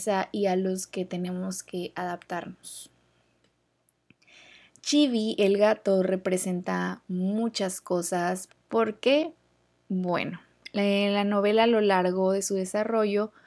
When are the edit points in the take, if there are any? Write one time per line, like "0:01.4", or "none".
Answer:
0:08.5